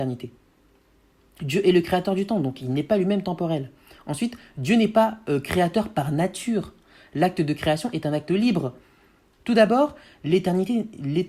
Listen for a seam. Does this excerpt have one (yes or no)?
yes